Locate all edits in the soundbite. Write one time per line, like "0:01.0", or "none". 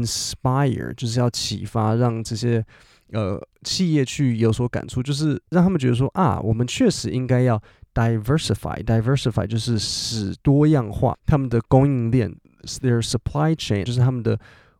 0:11.1
0:13.8